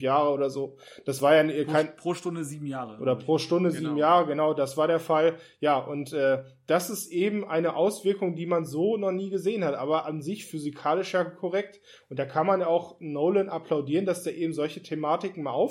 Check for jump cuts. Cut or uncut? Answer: uncut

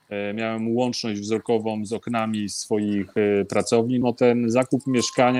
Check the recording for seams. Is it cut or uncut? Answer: cut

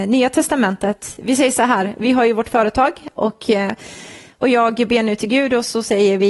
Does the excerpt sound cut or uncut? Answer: uncut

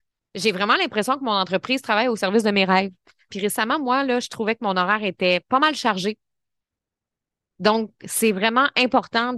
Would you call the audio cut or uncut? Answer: cut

